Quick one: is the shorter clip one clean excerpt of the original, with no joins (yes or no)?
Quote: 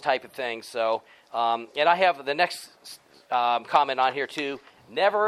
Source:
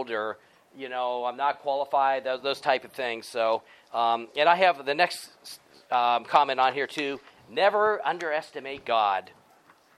yes